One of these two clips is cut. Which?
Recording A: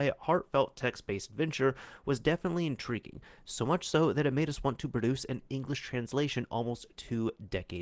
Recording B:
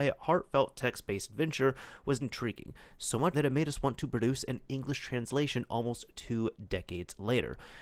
B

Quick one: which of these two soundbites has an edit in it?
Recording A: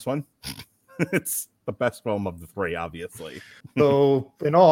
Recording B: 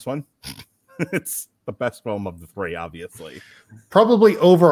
A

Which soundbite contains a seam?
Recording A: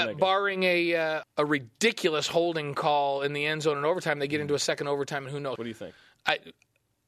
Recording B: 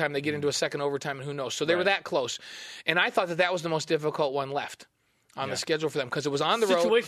A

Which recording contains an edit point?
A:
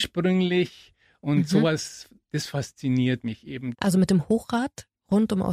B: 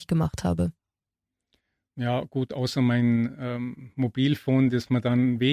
A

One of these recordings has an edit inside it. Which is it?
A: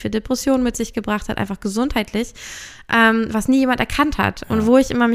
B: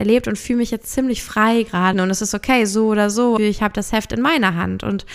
B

